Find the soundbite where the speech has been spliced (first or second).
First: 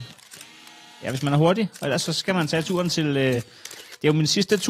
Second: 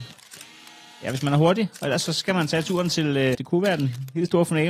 second